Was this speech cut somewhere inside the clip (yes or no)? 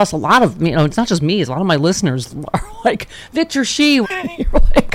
yes